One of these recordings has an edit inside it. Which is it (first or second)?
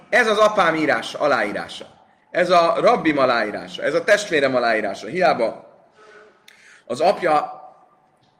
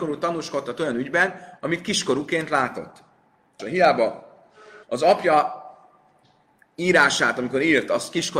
second